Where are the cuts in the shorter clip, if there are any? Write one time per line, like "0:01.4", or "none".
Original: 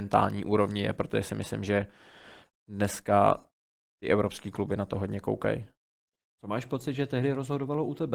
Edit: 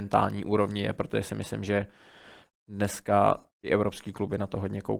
0:03.5

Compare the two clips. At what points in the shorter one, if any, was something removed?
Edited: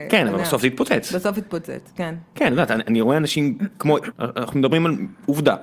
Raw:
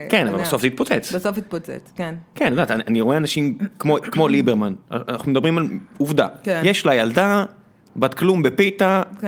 0:04.1

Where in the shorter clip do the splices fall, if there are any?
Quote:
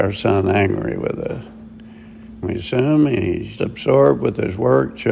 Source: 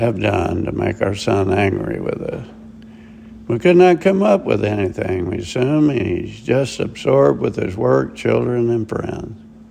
0:02.4
0:03.6

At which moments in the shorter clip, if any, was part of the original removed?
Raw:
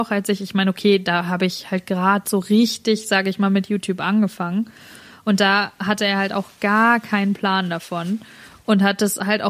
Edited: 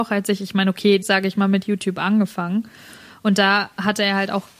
0:01.0

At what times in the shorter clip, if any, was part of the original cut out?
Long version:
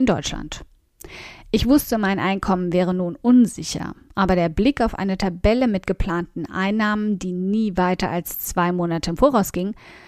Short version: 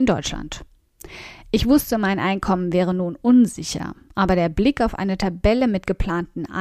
none

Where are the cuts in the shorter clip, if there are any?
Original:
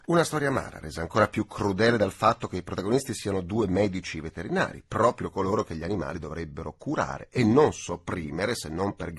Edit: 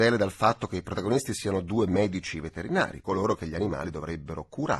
0:03.0

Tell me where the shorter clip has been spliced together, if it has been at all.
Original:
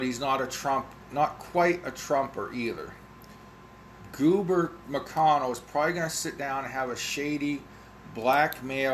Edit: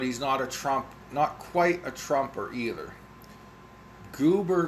none

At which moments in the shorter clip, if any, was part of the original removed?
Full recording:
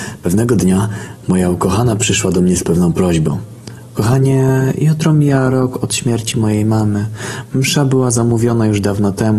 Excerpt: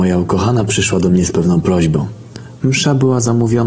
0:02.6

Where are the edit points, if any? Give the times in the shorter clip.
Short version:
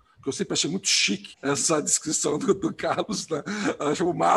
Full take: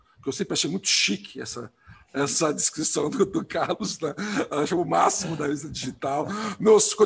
0:01.3

